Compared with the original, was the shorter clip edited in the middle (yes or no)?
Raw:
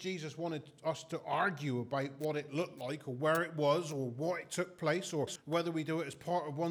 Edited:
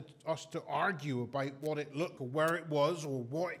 yes